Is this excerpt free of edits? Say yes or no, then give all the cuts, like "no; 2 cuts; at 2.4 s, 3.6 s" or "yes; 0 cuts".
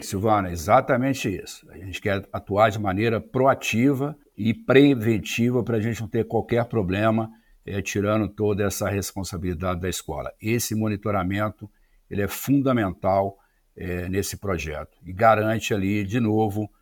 yes; 0 cuts